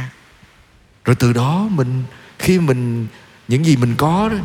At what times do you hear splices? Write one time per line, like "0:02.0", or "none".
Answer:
0:00.9